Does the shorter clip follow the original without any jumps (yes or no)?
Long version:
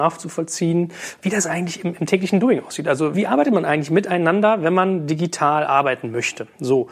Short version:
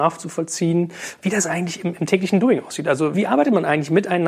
yes